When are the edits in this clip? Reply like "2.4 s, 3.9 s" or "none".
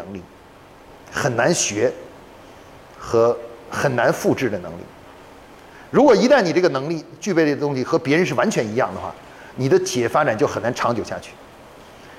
none

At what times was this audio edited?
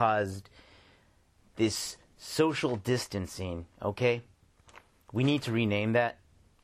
none

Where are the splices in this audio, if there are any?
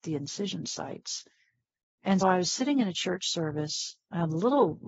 2.2 s

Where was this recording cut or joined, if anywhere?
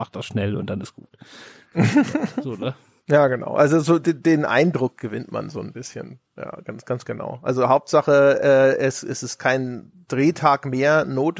none

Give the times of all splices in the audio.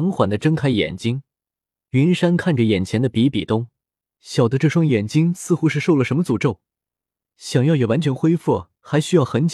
4.1 s

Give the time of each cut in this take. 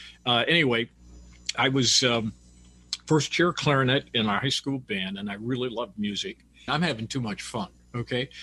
1.5 s, 6.7 s

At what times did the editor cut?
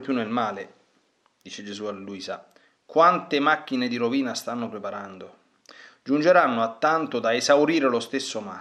none

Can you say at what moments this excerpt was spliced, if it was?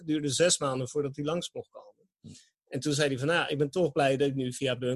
none

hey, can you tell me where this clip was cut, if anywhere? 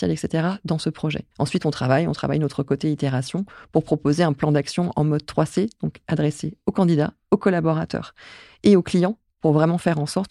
1.3 s

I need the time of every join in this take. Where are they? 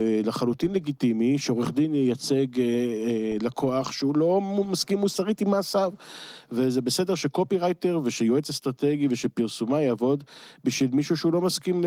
none

